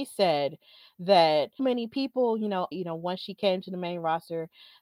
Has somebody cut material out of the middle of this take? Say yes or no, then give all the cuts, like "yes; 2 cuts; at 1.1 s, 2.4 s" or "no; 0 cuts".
yes; 2 cuts; at 1.6 s, 2.7 s